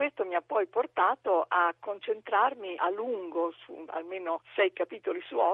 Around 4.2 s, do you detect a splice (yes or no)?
no